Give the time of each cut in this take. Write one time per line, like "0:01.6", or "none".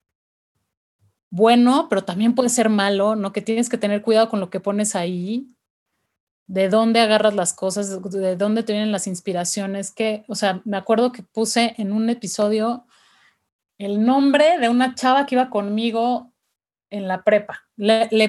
none